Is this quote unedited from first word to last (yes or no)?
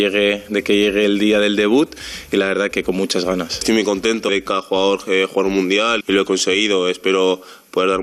no